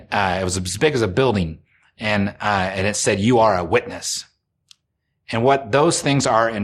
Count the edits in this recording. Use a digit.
0